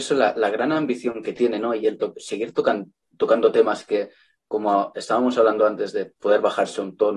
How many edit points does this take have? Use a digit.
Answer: 0